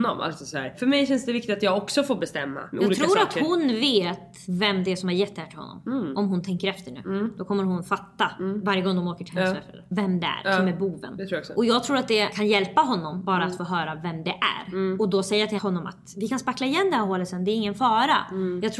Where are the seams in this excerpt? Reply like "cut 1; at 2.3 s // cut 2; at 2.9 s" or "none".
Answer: none